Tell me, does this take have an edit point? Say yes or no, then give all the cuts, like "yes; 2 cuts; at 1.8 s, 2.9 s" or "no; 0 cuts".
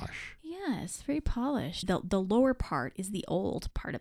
yes; 1 cut; at 1.8 s